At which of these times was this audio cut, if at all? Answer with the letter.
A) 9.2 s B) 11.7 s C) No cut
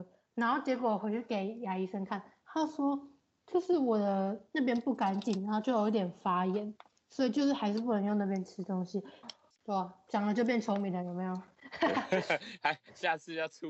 A